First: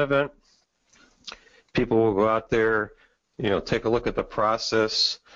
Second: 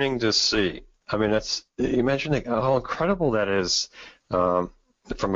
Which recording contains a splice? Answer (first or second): second